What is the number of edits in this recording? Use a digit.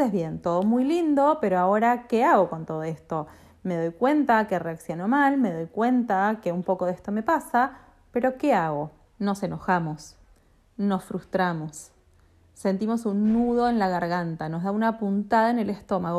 1